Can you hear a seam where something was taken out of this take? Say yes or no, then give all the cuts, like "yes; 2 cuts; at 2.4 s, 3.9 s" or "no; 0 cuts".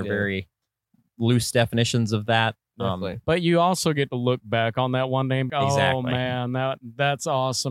yes; 1 cut; at 5.5 s